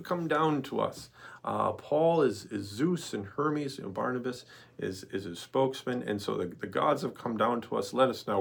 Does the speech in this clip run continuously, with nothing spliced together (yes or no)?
yes